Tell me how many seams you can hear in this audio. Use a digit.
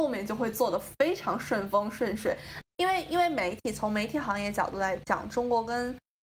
1